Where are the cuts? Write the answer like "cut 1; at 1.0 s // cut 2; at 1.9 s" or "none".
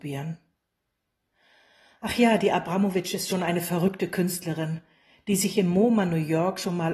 none